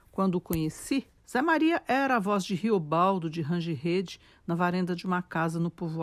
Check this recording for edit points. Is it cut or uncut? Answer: cut